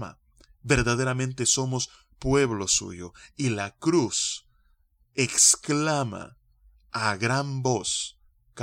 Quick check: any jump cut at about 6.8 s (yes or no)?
no